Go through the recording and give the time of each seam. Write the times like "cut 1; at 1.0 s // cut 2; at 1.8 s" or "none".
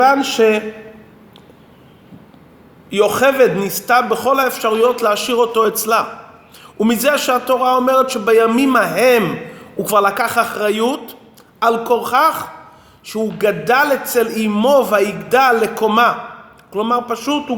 none